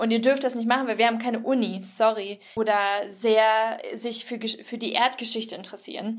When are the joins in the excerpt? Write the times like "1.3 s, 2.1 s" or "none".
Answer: 2.6 s